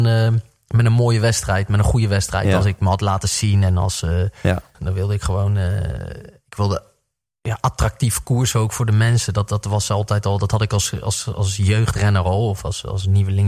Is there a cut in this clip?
yes; 1 cut; at 4.7 s

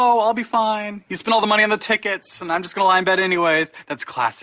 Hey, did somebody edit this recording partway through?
no; 0 cuts

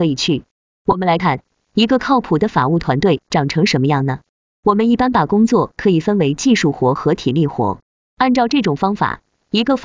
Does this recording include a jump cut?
yes; 1 cut; at 1.2 s

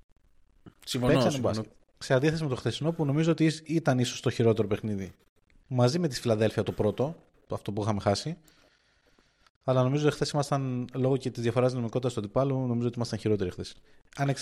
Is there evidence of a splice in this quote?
no; 0 cuts

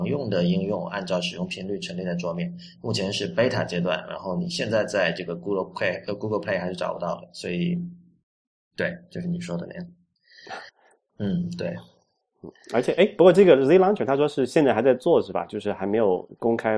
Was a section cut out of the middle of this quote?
yes; 1 cut; at 11.1 s

